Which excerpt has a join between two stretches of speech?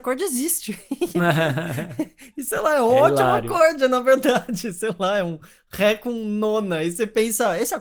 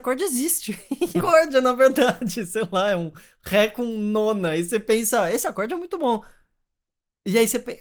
second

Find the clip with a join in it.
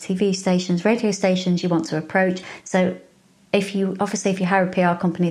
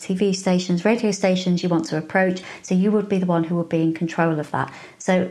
first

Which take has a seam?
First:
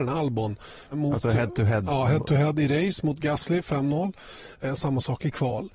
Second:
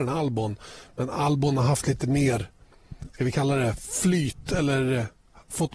first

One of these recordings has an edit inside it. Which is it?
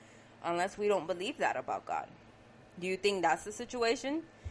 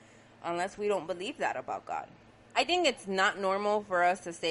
second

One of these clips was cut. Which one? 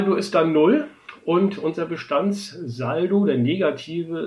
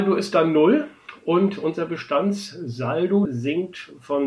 second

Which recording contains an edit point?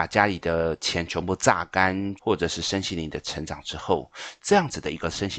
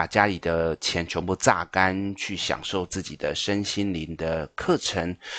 first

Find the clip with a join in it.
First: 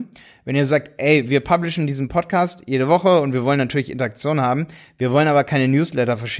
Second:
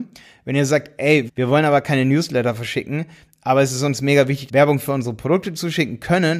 second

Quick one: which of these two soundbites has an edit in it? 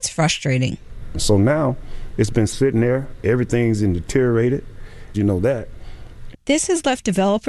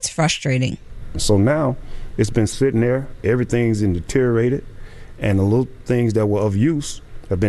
first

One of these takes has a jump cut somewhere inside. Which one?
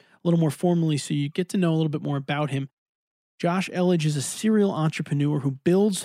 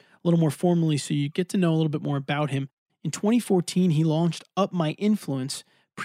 second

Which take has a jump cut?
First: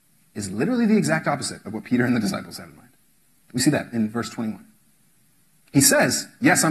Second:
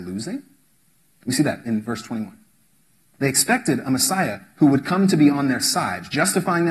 second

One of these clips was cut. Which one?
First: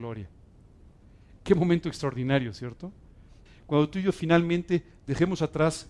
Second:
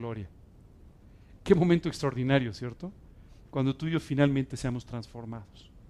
first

